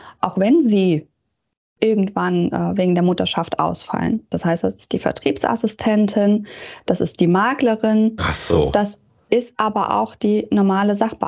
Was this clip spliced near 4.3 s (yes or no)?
yes